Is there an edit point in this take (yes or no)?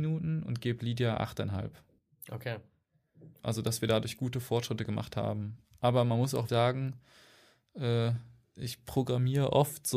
yes